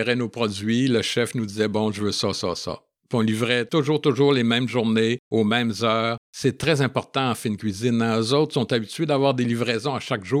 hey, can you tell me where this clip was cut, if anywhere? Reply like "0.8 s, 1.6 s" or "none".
none